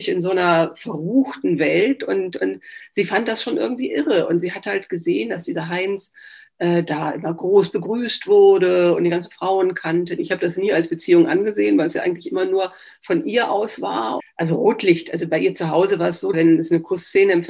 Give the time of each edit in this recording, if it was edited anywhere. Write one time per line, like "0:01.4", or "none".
0:10.2
0:14.2
0:16.3